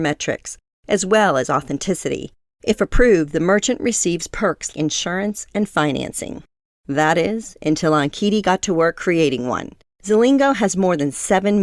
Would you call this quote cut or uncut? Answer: cut